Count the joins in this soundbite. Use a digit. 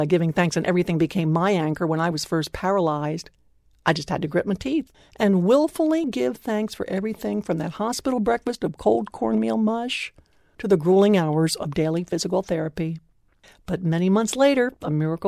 0